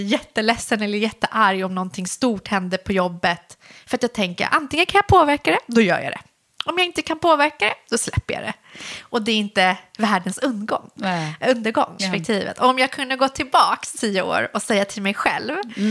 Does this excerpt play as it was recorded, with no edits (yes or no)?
no